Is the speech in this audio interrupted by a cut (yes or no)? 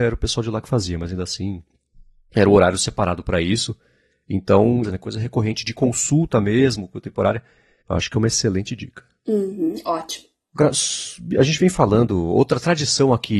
yes